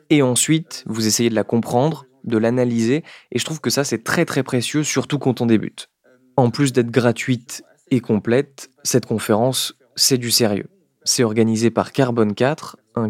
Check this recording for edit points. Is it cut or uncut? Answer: uncut